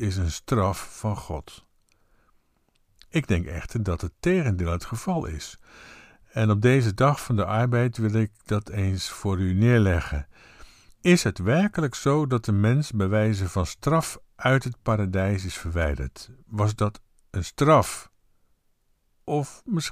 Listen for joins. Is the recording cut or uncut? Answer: uncut